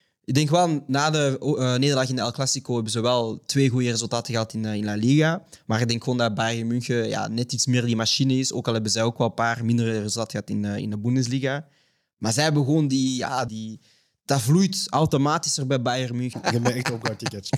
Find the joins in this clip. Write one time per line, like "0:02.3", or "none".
0:13.5
0:16.3